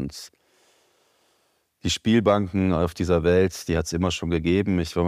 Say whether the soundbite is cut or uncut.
uncut